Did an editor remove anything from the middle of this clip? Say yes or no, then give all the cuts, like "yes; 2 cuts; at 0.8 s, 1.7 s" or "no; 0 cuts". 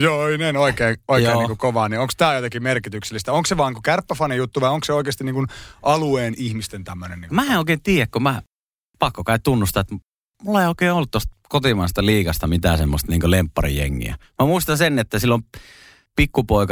no; 0 cuts